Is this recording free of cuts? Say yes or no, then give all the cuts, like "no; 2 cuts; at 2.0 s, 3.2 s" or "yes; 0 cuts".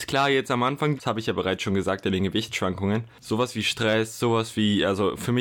no; 1 cut; at 0.9 s